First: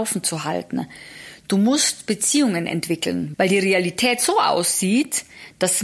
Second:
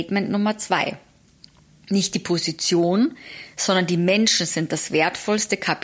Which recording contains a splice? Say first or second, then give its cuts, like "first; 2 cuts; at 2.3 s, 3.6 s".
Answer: first; 1 cut; at 3.3 s